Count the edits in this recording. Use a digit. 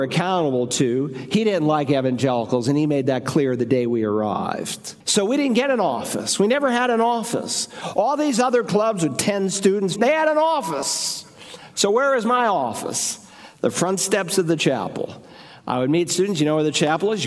2